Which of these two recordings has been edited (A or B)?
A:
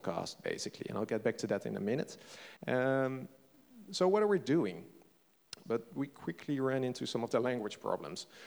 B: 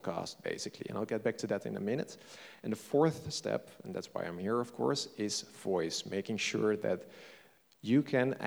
A